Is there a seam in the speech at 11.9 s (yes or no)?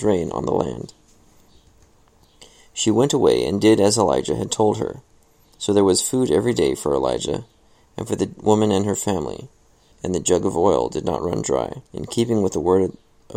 yes